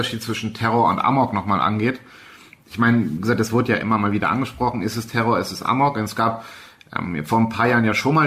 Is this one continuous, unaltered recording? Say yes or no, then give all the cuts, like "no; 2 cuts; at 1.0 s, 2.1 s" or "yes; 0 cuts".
yes; 0 cuts